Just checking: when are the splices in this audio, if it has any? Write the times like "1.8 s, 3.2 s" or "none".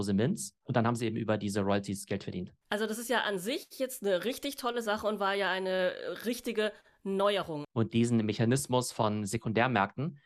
7.6 s